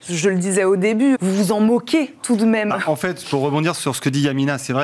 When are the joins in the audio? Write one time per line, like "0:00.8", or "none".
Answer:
0:01.1